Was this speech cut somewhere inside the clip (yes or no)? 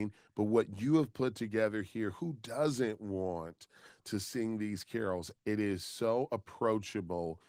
yes